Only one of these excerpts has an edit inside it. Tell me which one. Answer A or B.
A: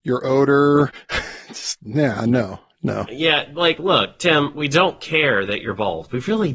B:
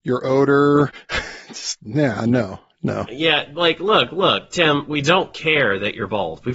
A